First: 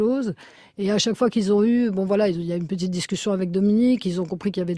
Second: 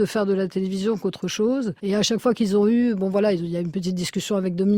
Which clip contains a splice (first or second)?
second